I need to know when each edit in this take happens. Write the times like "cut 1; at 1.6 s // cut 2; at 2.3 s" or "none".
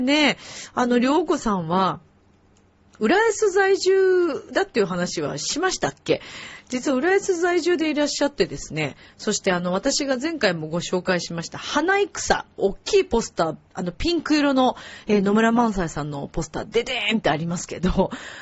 cut 1; at 12.6 s